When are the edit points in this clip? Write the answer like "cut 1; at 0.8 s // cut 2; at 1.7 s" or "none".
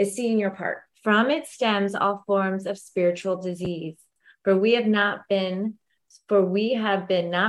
cut 1; at 0.9 s